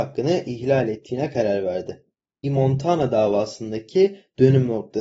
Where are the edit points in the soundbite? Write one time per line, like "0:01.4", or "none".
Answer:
0:02.4